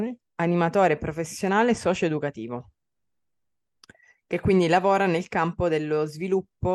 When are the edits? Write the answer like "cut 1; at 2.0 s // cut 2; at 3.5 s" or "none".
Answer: none